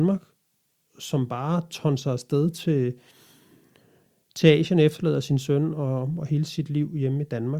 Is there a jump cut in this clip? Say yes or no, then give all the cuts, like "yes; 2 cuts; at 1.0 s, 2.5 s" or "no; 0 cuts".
no; 0 cuts